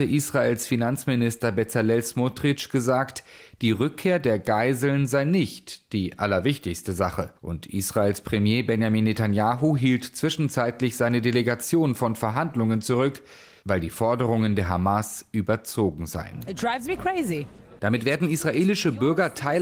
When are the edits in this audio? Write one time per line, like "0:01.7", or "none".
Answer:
0:07.4
0:17.8